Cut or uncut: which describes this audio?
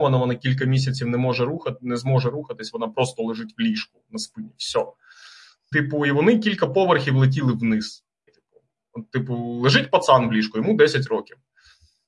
cut